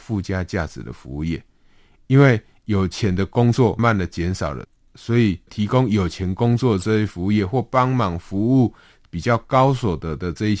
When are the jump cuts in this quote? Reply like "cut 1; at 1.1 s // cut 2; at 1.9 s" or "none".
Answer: cut 1; at 3.8 s